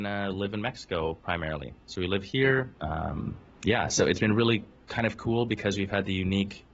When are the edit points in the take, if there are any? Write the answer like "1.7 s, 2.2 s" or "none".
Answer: 2.7 s